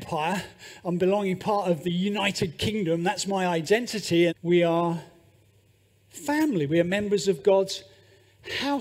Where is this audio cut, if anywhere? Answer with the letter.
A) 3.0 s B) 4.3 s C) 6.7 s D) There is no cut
B